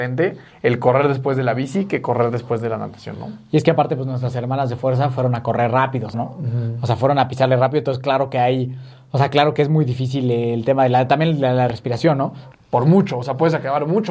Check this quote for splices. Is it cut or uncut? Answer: cut